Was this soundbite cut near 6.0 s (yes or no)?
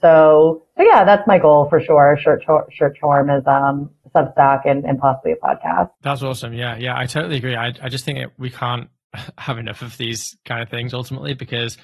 yes